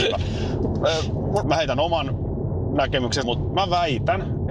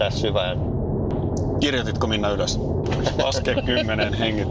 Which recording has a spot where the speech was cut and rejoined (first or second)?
first